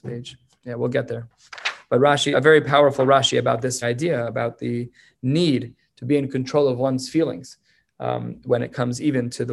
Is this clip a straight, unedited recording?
no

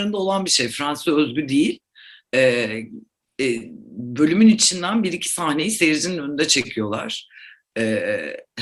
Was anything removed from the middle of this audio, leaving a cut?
no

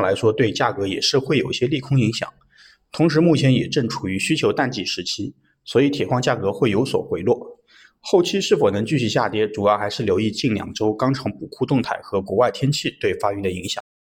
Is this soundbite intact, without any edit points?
yes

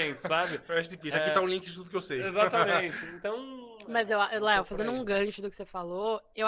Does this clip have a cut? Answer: no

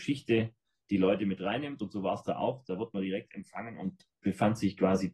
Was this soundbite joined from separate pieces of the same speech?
no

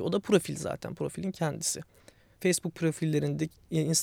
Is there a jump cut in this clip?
yes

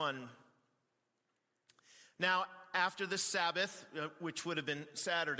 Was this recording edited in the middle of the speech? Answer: no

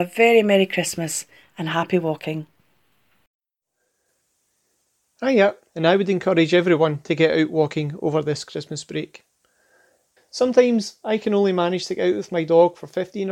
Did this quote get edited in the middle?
yes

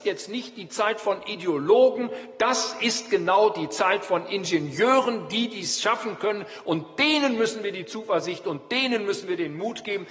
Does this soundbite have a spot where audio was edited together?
no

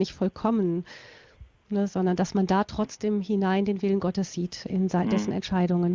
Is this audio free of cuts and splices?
yes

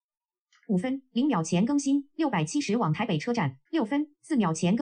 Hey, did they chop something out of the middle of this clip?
yes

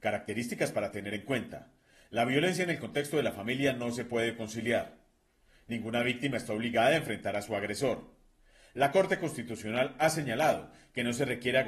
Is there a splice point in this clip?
no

